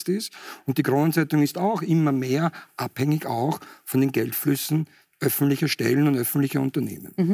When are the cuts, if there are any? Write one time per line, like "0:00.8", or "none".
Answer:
none